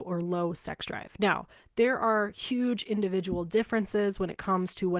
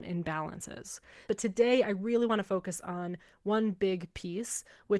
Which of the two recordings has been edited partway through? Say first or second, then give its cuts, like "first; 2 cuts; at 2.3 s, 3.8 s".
second; 1 cut; at 1.3 s